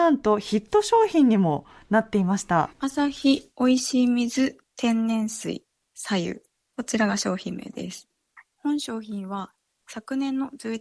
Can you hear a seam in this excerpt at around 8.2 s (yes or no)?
no